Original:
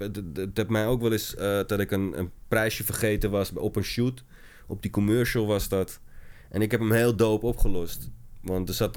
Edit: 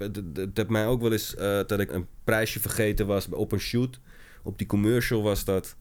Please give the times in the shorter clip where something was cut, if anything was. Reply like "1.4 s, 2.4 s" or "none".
1.9 s